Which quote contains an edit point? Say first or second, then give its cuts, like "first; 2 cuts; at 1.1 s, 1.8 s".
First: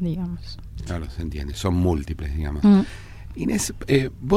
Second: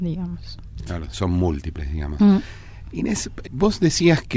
second; 2 cuts; at 1.1 s, 3.4 s